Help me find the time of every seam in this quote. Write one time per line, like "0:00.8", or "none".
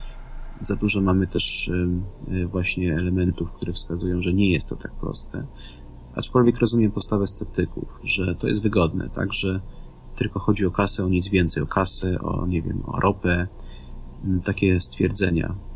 none